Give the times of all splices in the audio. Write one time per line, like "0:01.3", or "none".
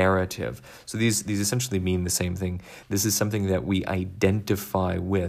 0:02.8